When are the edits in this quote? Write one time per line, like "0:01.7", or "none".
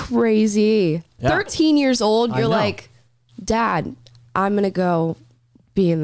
none